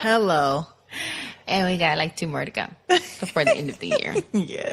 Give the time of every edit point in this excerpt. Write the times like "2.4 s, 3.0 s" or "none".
none